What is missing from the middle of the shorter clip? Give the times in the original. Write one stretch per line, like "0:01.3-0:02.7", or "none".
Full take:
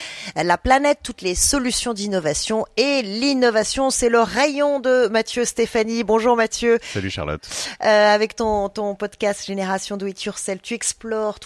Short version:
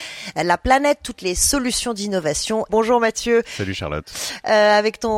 0:02.7-0:06.1